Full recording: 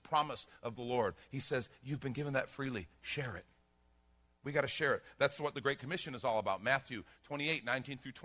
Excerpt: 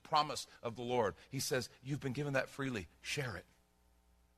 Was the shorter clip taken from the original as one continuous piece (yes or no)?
yes